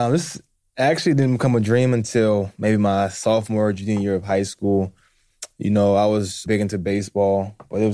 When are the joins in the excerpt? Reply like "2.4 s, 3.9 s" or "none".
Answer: 6.5 s

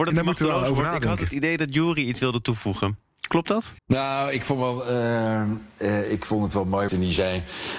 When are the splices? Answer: 3.8 s, 6.9 s

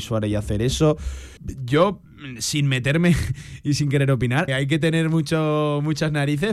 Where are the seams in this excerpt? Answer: 1.4 s, 4.5 s

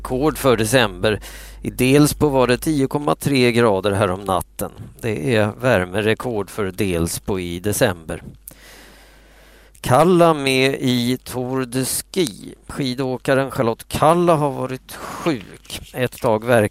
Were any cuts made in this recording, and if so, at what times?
none

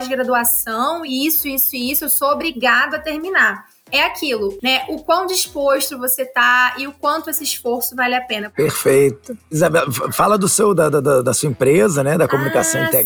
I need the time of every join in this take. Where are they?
none

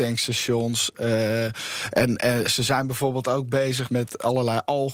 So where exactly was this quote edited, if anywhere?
3.9 s

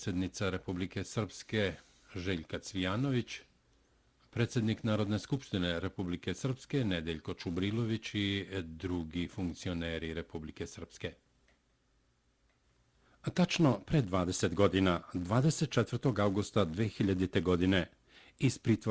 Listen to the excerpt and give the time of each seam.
none

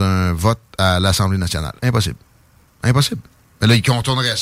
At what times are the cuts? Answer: none

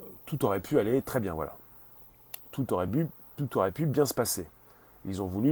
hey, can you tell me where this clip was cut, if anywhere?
none

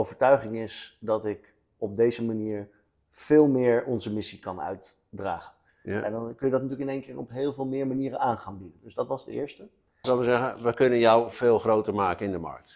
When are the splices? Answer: 5.7 s, 10.0 s, 11.3 s

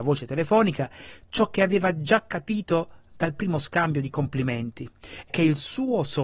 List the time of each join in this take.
5.3 s

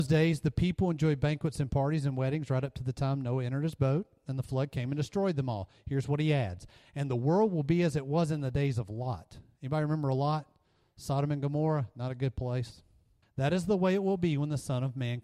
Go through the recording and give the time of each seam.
13.2 s

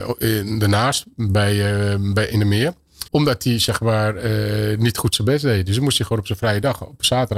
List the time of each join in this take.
3.1 s

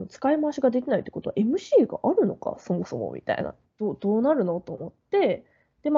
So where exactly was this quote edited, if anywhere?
3.6 s

